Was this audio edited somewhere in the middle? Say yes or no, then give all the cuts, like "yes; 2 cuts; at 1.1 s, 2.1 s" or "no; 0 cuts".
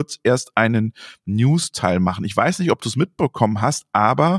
no; 0 cuts